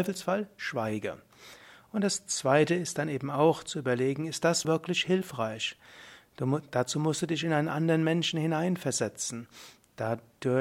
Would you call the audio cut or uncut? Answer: cut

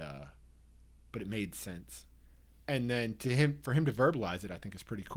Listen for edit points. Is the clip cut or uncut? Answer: uncut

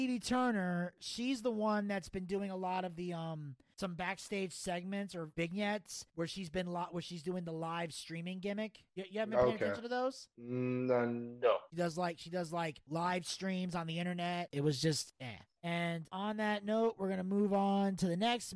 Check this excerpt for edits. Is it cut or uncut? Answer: cut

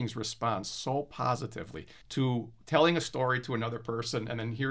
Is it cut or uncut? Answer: cut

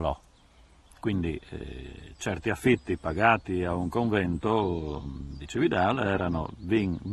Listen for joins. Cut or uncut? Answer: uncut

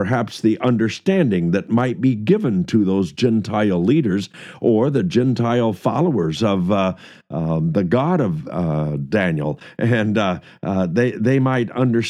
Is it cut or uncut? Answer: uncut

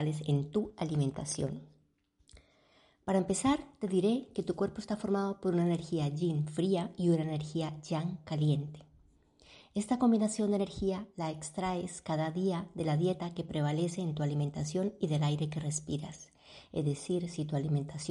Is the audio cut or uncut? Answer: uncut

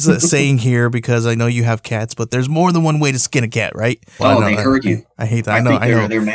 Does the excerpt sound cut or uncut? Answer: cut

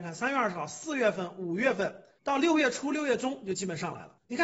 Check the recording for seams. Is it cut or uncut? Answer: uncut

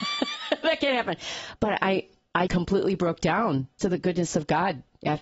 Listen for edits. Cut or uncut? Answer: cut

